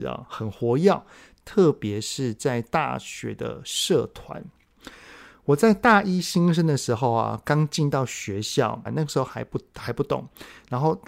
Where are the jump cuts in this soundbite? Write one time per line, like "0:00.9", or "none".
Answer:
0:08.9